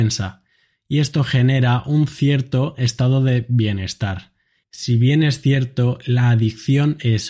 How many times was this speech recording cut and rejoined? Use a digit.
1